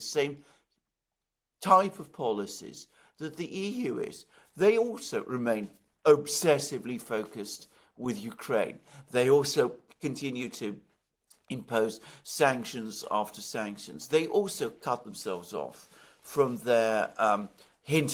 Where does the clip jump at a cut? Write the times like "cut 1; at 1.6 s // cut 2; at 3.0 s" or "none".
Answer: none